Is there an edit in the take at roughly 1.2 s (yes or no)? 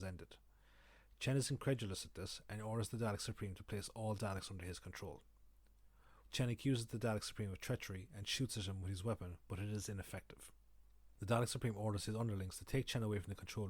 no